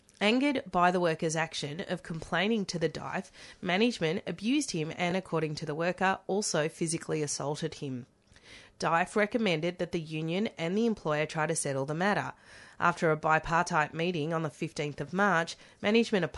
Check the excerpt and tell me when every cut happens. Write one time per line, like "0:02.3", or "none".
none